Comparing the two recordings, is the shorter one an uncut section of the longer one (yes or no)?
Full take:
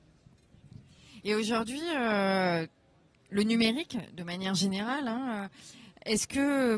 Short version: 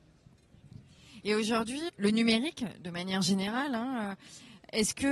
no